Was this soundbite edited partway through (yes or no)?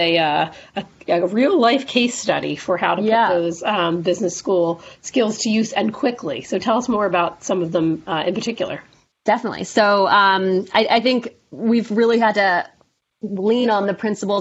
no